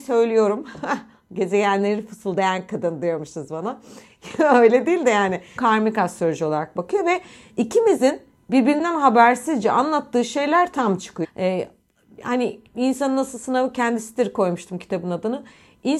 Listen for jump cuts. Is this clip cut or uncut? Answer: cut